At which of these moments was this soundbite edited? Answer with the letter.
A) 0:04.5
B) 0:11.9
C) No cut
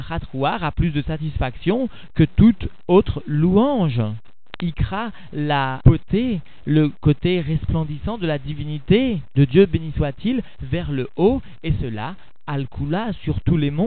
A